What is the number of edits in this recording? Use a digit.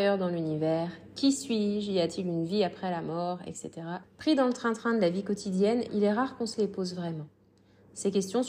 2